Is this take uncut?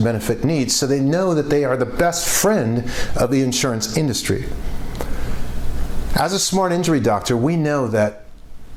yes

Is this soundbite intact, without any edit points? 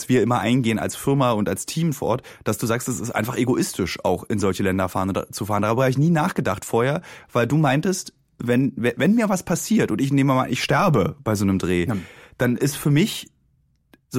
yes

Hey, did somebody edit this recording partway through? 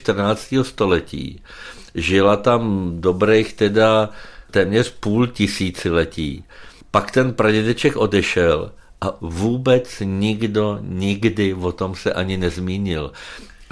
no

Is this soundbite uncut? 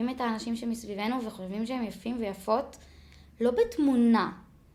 yes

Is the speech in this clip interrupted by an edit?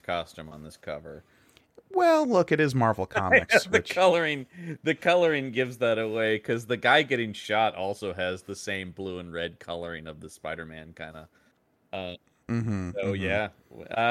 no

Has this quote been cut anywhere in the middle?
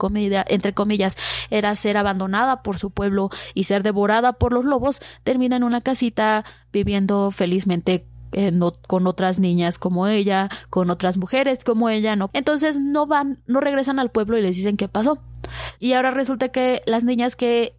yes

